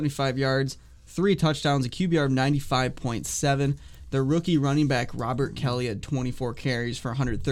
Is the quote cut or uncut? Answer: uncut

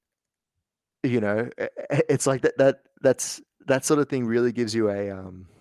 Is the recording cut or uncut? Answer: uncut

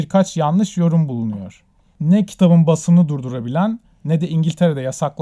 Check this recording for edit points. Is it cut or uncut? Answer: cut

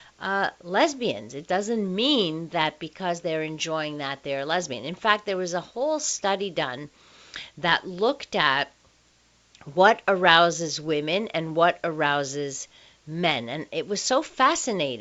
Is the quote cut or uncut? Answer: uncut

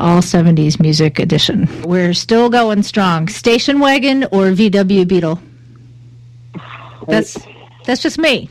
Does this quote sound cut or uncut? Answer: cut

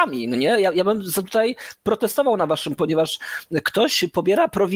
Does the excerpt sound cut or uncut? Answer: cut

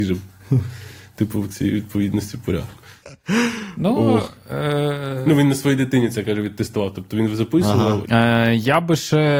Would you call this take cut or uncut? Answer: cut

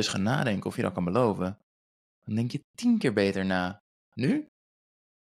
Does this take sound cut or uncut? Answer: uncut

